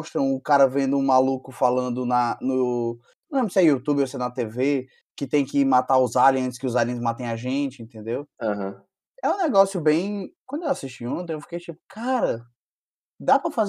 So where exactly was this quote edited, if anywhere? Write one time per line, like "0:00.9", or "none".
0:10.4